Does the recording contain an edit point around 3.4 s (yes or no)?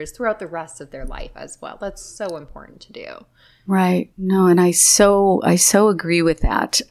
no